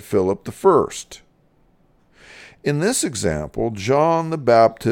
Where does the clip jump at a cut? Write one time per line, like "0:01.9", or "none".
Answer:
none